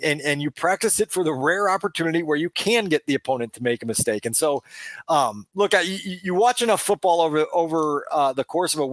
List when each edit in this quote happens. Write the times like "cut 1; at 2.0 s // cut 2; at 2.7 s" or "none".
none